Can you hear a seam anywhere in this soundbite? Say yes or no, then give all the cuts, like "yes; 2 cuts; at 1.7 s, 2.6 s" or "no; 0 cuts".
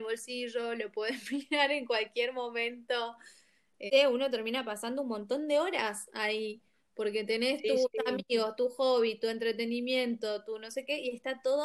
yes; 1 cut; at 3.9 s